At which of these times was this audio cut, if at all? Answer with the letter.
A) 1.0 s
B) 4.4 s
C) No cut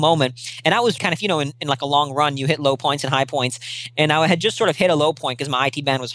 A